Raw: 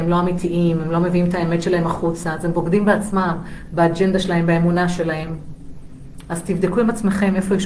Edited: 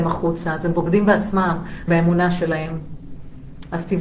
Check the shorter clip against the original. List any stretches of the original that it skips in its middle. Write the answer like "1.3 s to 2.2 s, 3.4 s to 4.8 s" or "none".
3.7 s to 4.5 s